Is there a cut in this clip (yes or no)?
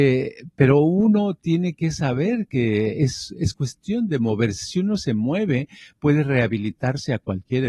no